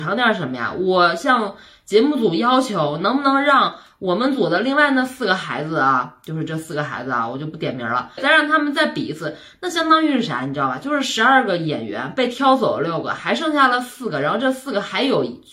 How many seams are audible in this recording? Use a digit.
1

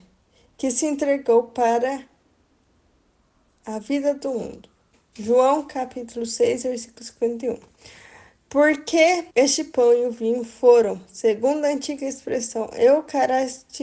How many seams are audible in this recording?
1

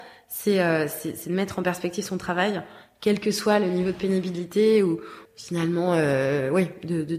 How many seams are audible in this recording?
1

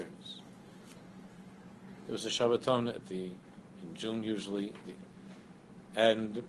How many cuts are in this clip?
2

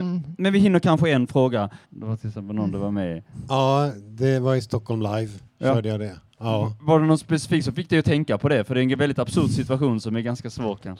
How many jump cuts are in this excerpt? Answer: 1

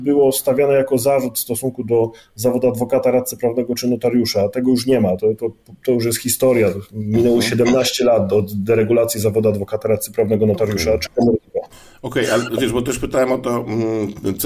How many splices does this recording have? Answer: 0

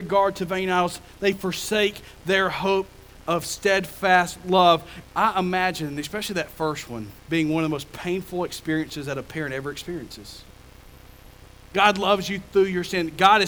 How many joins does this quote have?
3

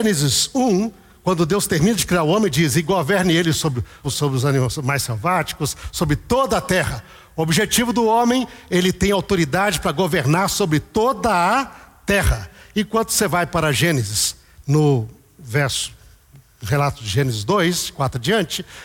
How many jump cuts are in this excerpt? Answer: 1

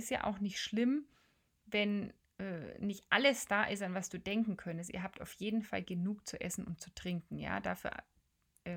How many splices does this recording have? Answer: 0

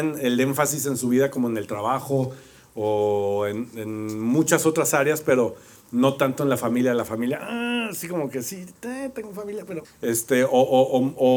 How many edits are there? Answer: 1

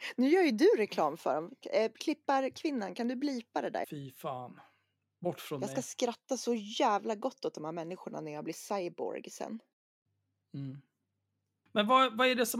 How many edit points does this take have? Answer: 1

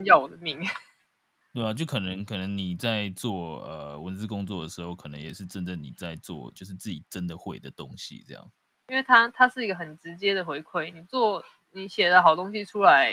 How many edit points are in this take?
1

